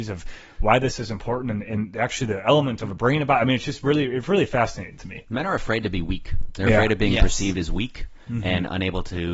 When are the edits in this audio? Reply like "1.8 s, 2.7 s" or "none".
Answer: none